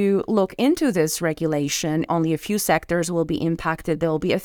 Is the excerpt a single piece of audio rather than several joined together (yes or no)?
no